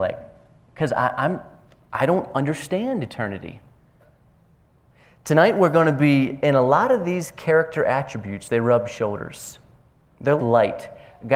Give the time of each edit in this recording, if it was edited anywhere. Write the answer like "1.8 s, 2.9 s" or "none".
10.4 s